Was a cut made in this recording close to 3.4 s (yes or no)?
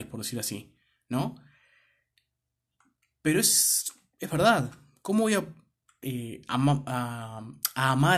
no